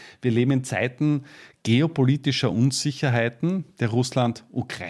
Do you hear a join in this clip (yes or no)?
no